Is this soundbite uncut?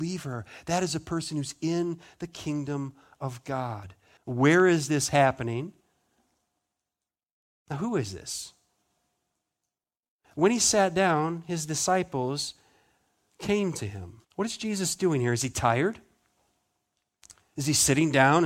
no; 2 cuts; at 4.2 s, 14.2 s

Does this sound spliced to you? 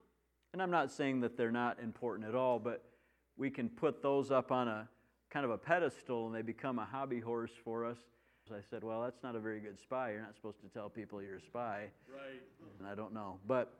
yes; 2 cuts; at 8.5 s, 12.8 s

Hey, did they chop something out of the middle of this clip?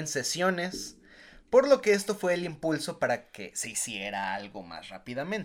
no; 0 cuts

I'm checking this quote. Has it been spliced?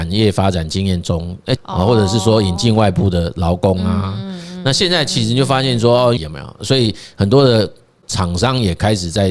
yes; 2 cuts; at 1.6 s, 6.2 s

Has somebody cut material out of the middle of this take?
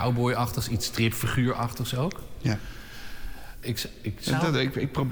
yes; 1 cut; at 3.6 s

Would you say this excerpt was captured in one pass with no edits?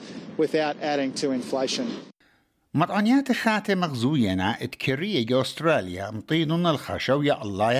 yes; 0 cuts

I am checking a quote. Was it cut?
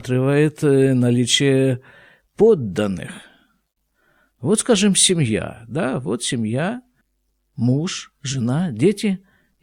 no; 0 cuts

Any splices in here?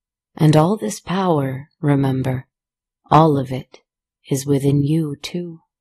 no; 0 cuts

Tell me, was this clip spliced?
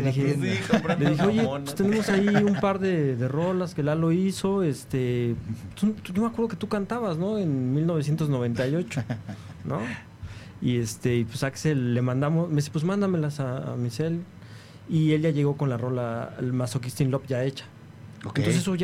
no; 0 cuts

